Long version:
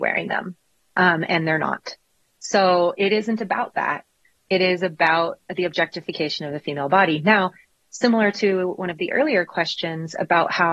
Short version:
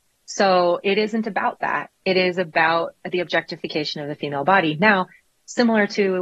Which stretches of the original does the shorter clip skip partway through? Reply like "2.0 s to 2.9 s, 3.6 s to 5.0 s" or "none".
4.1 s to 4.4 s

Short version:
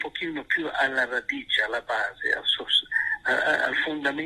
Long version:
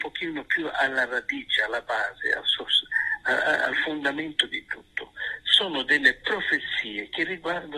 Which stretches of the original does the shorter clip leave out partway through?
none

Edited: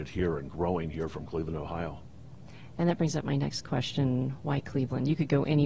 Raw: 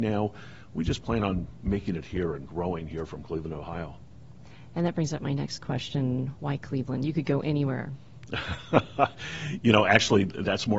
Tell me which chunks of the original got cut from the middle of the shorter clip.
none

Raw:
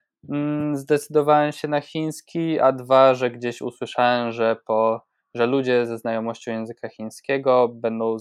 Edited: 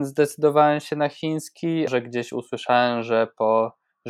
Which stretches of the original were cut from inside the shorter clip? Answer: 2.6 s to 3.2 s

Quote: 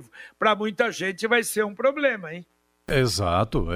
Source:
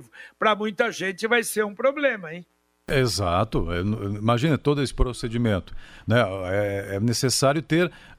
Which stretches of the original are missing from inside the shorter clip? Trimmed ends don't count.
none

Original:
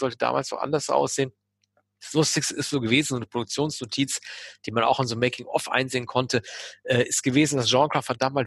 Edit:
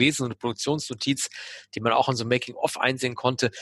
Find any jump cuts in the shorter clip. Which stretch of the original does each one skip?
none

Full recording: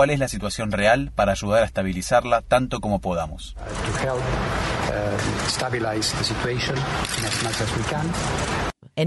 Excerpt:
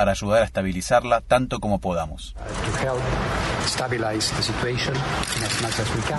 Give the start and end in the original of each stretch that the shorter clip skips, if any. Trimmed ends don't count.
4.8 s to 5.4 s

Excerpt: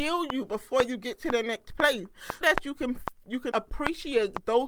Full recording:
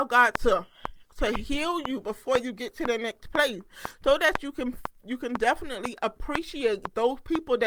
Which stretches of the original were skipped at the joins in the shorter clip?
4.0 s to 4.2 s, 5.3 s to 6.0 s

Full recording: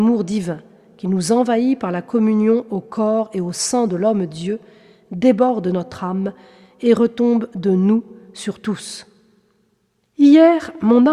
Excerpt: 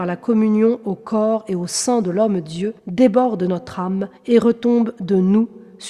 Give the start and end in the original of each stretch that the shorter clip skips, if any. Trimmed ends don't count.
4.6 s to 5.0 s, 6.4 s to 6.7 s

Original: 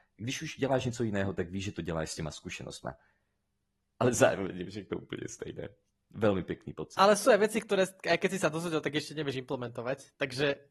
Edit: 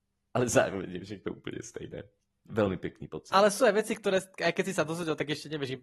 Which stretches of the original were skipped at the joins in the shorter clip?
none

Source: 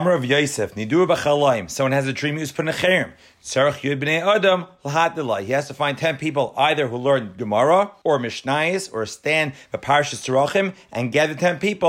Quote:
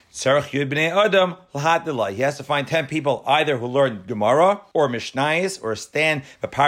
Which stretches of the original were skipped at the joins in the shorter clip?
none

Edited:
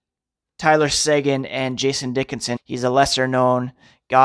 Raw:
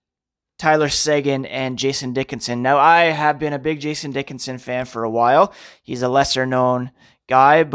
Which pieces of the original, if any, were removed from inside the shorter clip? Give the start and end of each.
2.6 s to 5.7 s

